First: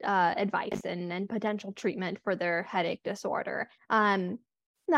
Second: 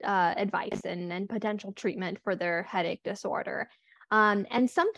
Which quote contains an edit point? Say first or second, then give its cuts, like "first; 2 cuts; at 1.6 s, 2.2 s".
first; 1 cut; at 3.8 s